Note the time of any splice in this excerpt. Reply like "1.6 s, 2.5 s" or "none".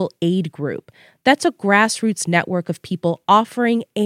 none